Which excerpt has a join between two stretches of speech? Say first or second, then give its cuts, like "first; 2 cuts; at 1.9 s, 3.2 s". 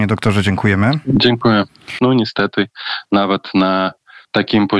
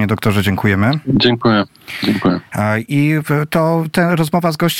first; 1 cut; at 2.0 s